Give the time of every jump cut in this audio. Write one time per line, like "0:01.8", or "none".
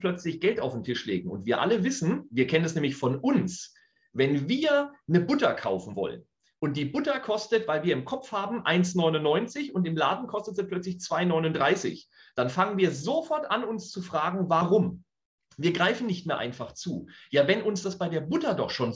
none